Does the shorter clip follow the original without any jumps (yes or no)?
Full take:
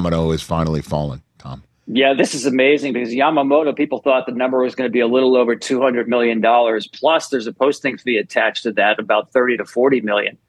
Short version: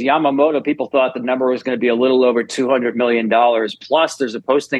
yes